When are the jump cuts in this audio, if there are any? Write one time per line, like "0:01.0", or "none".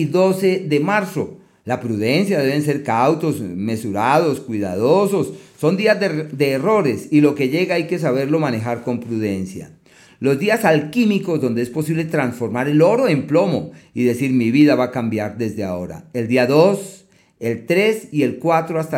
none

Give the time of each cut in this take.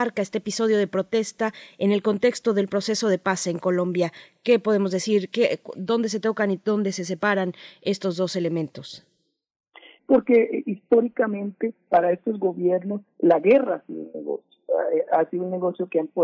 0:10.0
0:11.9

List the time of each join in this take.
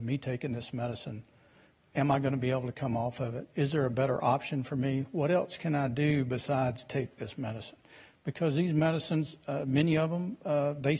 none

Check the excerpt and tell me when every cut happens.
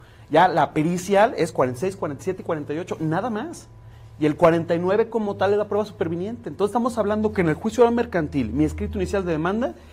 none

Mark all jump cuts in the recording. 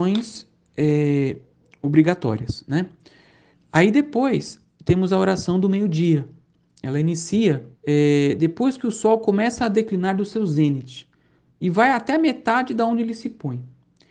0:03.5
0:07.8

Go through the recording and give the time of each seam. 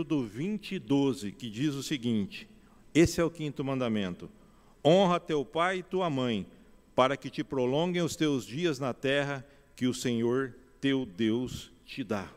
none

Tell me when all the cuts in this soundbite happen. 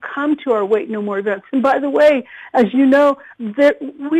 none

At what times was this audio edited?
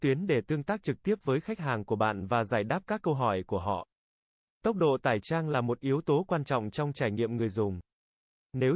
none

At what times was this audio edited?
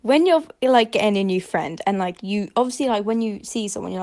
none

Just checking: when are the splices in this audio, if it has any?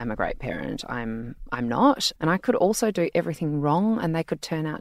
0:02.2

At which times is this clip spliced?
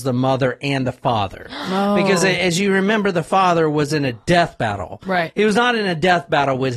none

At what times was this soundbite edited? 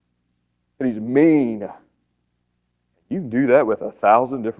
0:02.9

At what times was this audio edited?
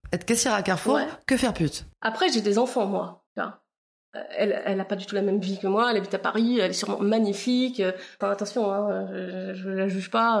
0:03.3
0:08.2

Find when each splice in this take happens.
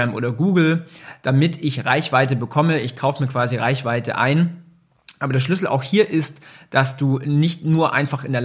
none

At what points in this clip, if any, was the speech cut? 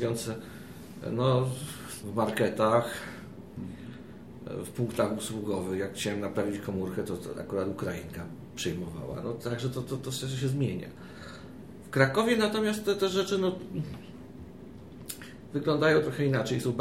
0:02.0

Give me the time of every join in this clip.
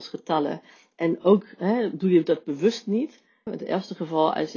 0:03.5

